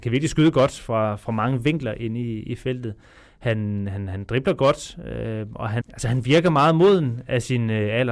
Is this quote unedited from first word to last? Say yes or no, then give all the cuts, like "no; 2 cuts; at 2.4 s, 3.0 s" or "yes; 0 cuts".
no; 1 cut; at 5.8 s